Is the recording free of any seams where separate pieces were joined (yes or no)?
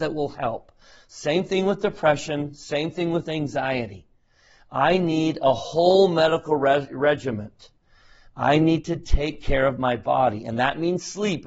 yes